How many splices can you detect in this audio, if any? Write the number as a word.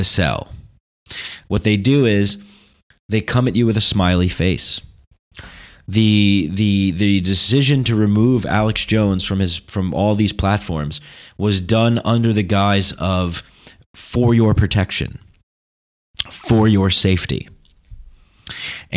one